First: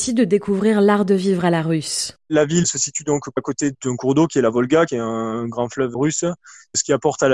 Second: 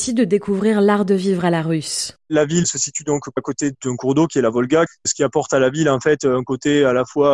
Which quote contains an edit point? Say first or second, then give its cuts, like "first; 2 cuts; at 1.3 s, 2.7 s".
second; 1 cut; at 4.9 s